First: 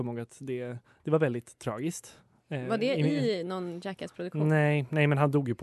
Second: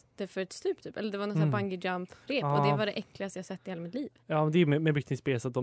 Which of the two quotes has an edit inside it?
second; 1 cut; at 2.2 s

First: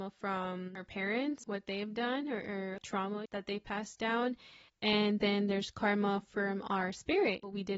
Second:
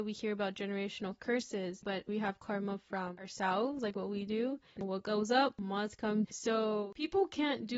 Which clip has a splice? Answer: second; 2 cuts; at 4.8 s, 6.2 s

